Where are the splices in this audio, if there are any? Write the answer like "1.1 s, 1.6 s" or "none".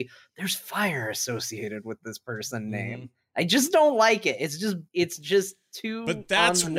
4.9 s